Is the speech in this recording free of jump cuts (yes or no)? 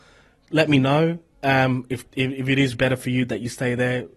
no